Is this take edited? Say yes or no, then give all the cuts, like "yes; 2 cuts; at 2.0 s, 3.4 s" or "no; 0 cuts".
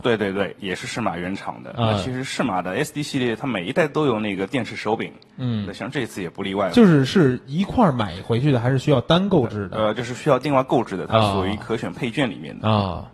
no; 0 cuts